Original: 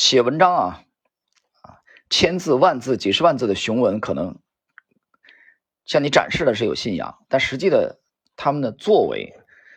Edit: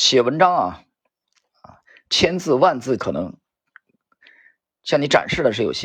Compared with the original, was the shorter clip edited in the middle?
yes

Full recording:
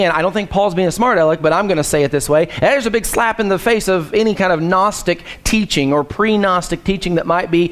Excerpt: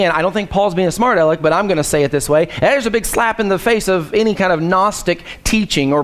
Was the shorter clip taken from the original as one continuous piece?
yes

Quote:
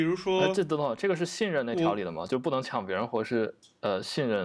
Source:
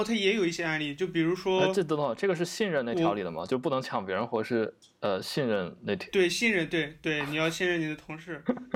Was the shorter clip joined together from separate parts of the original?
no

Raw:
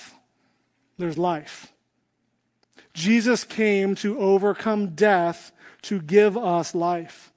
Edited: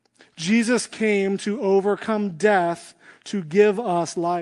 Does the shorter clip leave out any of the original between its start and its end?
no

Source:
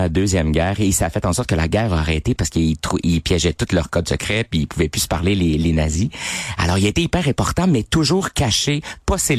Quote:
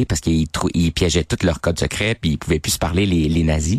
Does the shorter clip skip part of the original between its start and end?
no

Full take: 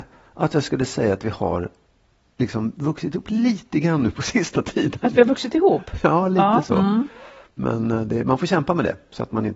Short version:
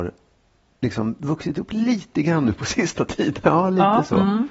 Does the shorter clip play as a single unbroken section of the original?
no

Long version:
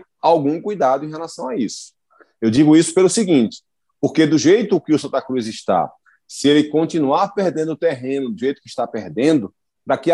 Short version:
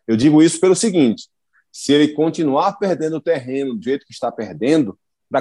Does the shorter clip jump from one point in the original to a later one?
yes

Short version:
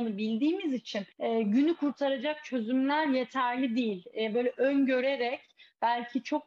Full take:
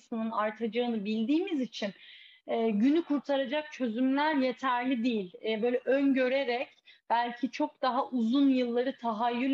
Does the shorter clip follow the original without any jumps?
no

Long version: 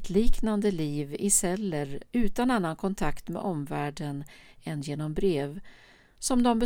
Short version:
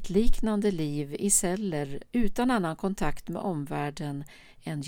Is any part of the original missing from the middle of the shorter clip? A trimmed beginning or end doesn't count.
no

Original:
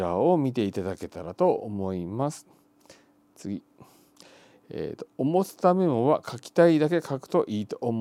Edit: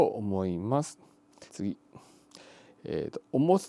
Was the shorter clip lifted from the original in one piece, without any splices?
no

